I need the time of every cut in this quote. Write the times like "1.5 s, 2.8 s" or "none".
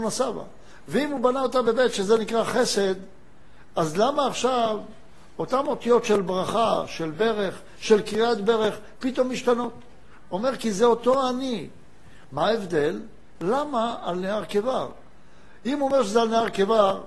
12.2 s, 13.4 s

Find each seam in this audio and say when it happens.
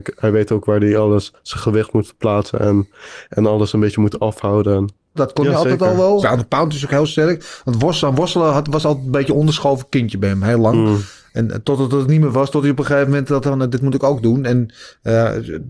5.2 s, 6.2 s

